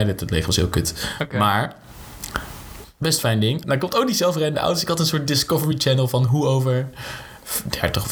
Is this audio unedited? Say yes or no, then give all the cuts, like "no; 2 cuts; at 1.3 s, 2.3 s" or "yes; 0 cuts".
no; 1 cut; at 3.6 s